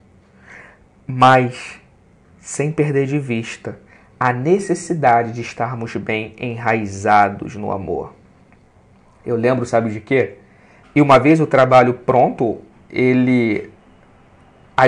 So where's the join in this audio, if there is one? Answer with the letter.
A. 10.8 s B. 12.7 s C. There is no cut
A